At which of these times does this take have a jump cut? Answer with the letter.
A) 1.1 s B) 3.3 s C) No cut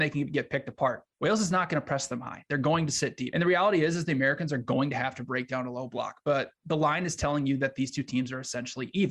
B